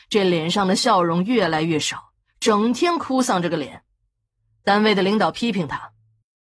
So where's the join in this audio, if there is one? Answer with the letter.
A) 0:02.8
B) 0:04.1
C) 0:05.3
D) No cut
D